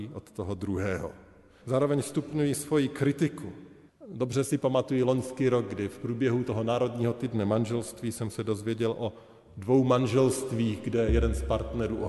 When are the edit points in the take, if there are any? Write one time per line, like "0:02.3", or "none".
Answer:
0:01.6
0:03.9